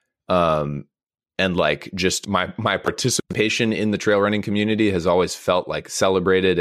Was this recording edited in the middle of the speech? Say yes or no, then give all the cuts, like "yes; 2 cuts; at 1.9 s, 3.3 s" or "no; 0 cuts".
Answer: no; 0 cuts